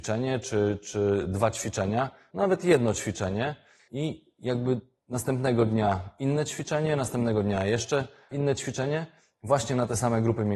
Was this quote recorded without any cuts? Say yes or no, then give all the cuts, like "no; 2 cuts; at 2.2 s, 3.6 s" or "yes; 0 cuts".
no; 1 cut; at 3.8 s